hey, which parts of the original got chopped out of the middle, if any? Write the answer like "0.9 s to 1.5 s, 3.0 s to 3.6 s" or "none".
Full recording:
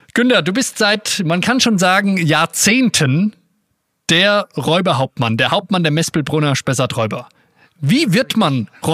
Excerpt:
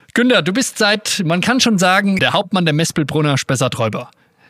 2.2 s to 5.4 s